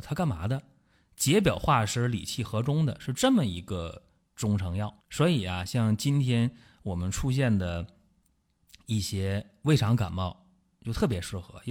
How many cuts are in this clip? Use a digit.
1